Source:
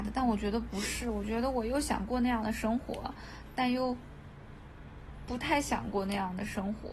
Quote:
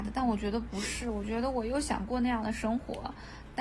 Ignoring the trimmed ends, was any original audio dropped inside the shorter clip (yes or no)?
no